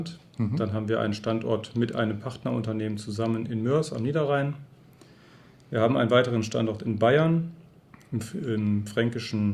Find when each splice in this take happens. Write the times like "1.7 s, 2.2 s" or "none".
none